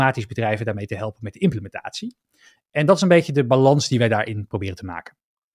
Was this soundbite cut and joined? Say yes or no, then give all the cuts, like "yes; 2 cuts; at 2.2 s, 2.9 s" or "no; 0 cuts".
no; 0 cuts